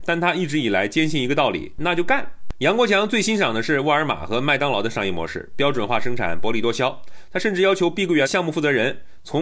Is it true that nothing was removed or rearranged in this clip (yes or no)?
no